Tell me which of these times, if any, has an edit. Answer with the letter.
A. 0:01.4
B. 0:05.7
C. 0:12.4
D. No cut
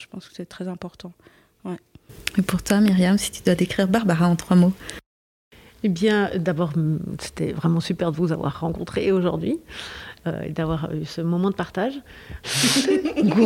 C